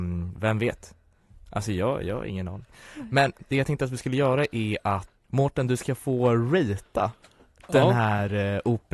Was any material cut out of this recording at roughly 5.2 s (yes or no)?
yes